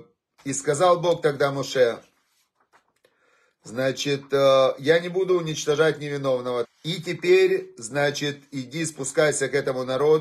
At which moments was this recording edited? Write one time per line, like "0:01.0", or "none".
0:06.6